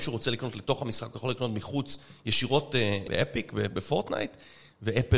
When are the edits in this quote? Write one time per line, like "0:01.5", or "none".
0:03.1